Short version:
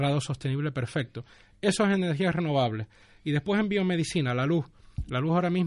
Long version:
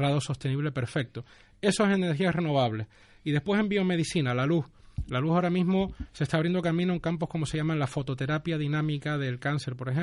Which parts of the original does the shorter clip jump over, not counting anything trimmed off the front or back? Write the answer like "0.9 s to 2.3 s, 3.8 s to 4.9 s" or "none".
none